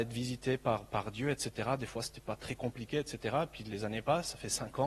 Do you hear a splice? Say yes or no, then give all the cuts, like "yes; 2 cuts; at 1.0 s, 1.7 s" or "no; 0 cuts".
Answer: no; 0 cuts